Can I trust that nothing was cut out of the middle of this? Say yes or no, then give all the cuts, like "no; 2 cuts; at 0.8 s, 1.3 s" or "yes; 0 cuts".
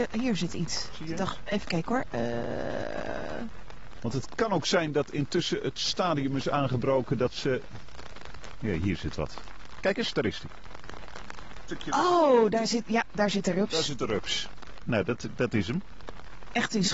yes; 0 cuts